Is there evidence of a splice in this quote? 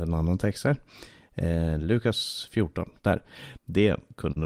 yes; 1 cut; at 3.6 s

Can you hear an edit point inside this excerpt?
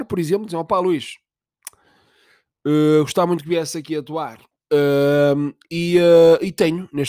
yes; 1 cut; at 4.5 s

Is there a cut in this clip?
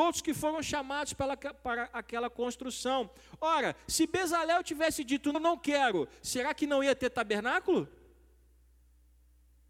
yes; 1 cut; at 5.3 s

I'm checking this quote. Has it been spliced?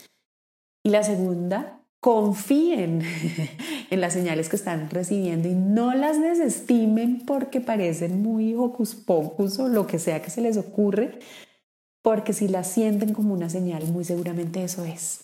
no; 0 cuts

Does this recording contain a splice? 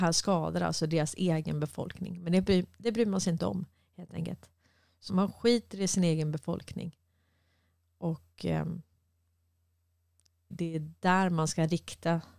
yes; 2 cuts; at 5.1 s, 10.5 s

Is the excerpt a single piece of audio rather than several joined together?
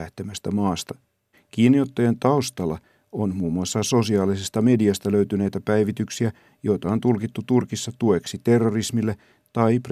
no; 1 cut; at 1.3 s

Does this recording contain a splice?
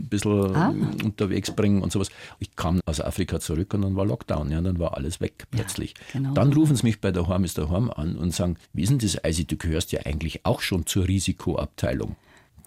no; 0 cuts

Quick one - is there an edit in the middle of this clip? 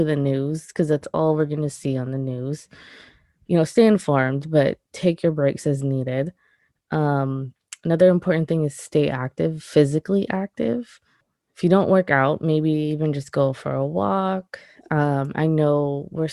no; 0 cuts

